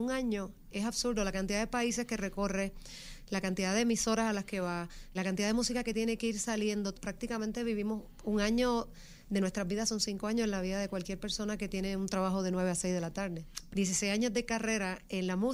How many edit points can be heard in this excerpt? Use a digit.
3